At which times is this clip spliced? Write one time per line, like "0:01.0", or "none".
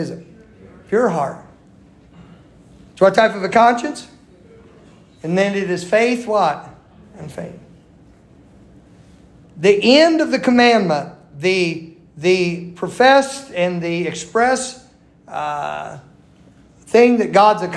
none